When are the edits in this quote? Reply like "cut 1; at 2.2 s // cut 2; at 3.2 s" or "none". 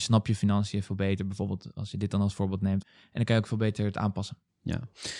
cut 1; at 2.8 s